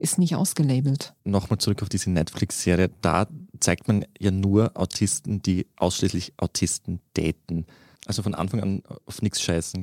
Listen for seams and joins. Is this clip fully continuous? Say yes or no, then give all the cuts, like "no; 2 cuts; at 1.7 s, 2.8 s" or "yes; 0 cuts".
no; 2 cuts; at 1.2 s, 8.0 s